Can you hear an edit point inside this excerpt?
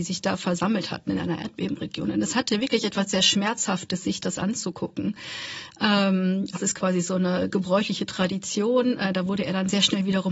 yes; 1 cut; at 6.5 s

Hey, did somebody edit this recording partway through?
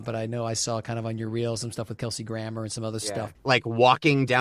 yes; 1 cut; at 3.4 s

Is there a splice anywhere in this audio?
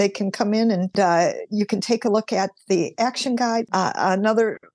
yes; 1 cut; at 3.7 s

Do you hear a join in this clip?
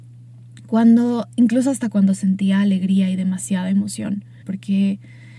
yes; 1 cut; at 4.4 s

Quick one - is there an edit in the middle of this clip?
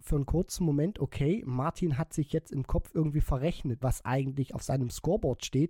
yes; 1 cut; at 3.8 s

